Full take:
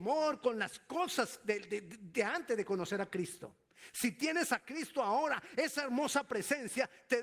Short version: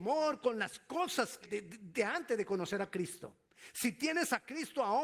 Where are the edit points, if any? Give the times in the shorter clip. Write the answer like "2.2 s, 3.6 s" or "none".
1.4 s